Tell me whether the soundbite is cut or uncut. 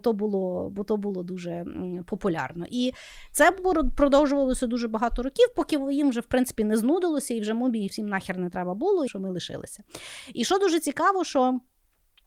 cut